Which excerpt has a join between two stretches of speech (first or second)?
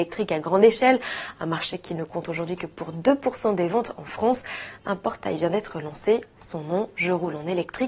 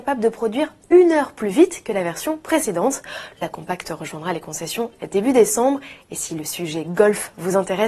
second